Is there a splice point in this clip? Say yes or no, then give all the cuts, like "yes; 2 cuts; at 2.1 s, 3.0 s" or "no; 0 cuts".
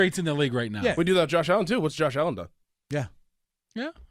no; 0 cuts